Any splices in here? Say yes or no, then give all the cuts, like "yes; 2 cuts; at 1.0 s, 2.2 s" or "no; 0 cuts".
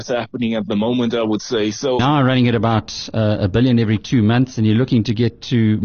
yes; 1 cut; at 2.0 s